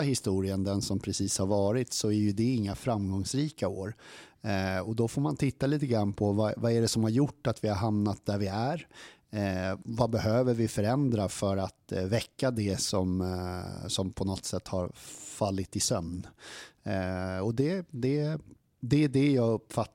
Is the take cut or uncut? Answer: uncut